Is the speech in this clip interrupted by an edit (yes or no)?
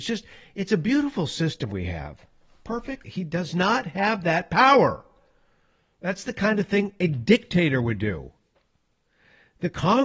yes